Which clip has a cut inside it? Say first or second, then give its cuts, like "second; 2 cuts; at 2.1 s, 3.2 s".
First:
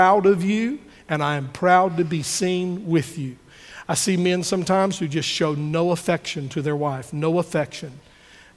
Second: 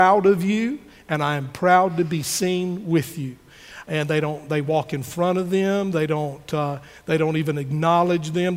second; 1 cut; at 3.8 s